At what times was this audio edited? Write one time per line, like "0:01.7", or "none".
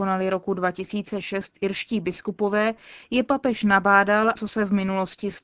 0:04.4